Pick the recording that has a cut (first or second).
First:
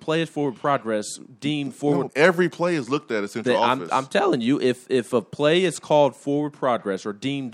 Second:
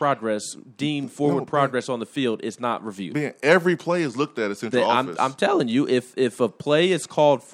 first